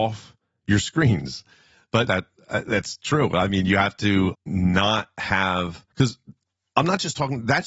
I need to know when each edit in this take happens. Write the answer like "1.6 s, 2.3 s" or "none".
2.1 s, 4.3 s, 5.9 s